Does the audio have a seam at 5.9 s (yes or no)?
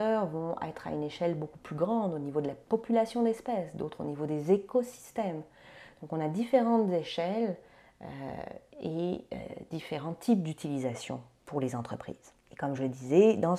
no